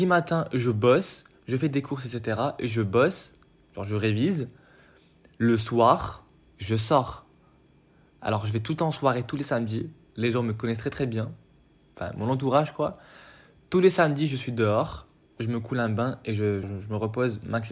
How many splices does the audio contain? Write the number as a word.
two